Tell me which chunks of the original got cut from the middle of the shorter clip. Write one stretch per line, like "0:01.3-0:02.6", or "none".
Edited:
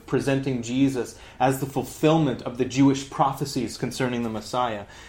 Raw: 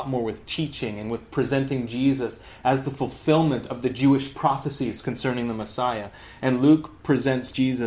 none